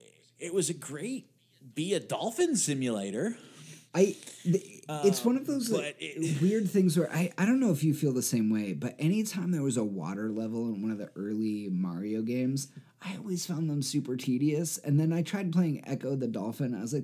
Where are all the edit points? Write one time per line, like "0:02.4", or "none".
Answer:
none